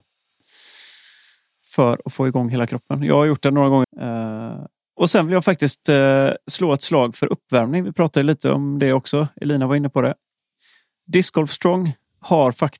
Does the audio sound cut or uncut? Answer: cut